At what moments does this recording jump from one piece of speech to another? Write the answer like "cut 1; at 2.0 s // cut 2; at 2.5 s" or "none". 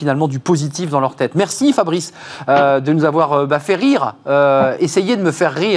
none

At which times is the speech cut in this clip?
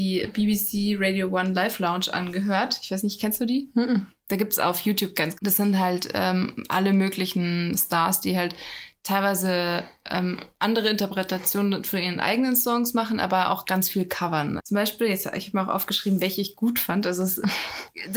cut 1; at 5.3 s // cut 2; at 14.6 s

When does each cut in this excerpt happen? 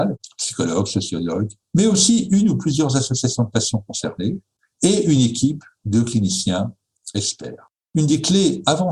cut 1; at 1.6 s // cut 2; at 7.7 s

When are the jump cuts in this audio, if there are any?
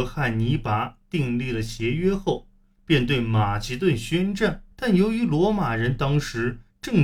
cut 1; at 4.7 s

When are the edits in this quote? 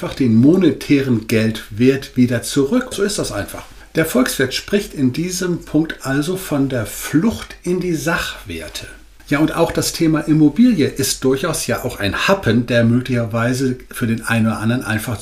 cut 1; at 2.9 s // cut 2; at 9.2 s

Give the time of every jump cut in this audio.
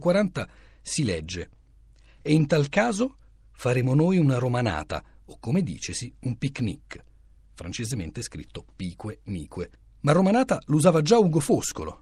none

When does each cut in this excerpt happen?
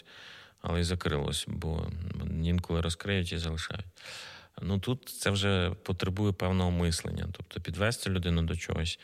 none

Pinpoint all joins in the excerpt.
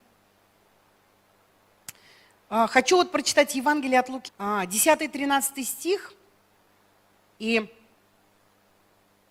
cut 1; at 4.3 s // cut 2; at 7.3 s

